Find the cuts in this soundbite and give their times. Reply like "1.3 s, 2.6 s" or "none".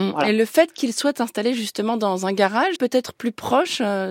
2.8 s